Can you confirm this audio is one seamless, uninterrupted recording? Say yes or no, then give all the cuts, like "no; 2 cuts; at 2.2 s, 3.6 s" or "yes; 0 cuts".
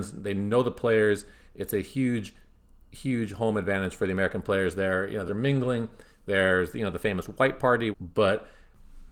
no; 2 cuts; at 5.3 s, 7.9 s